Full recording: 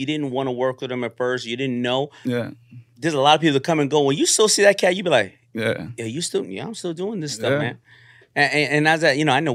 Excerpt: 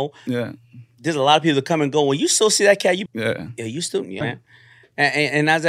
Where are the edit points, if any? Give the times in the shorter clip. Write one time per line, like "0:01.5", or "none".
0:03.1
0:04.2